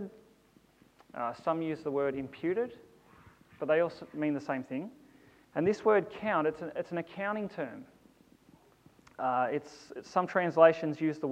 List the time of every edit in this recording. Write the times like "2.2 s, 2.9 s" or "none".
5.4 s